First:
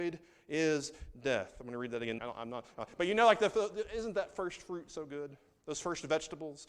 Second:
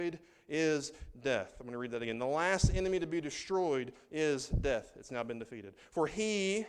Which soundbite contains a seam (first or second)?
first